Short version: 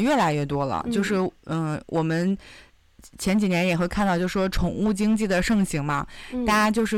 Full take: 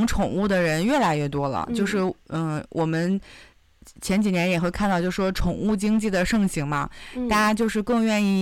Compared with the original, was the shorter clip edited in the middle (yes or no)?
no